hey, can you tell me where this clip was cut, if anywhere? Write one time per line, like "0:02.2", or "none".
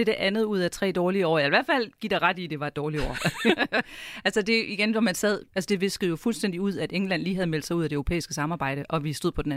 0:05.5

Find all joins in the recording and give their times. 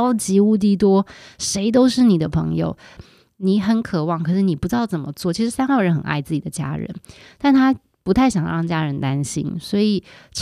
0:03.0

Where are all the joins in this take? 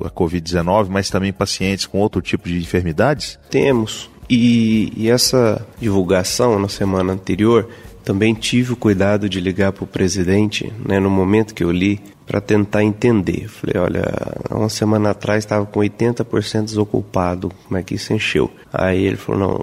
none

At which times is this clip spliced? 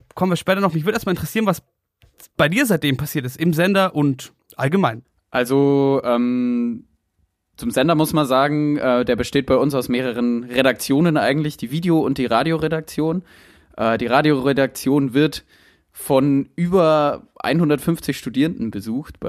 none

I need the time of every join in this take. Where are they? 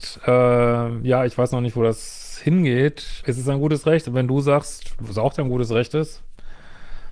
0:03.2

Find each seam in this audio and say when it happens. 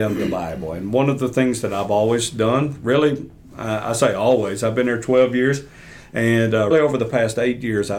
0:06.7

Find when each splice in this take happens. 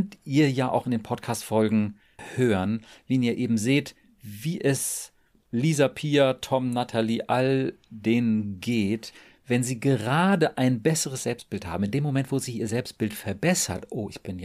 none

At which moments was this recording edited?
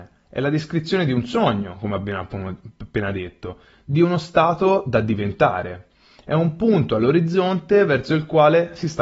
none

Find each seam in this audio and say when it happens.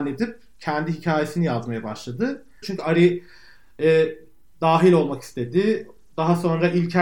0:02.6

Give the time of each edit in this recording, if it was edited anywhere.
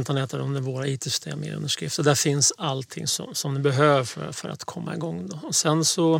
none

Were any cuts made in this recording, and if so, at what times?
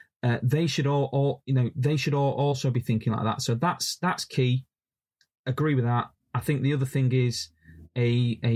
none

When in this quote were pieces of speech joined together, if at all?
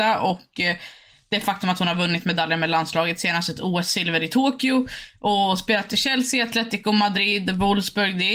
none

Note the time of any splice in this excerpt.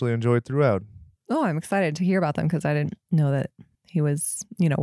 none

